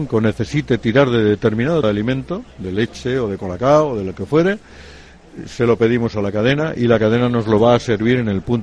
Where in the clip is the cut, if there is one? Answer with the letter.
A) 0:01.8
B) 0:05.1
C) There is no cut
A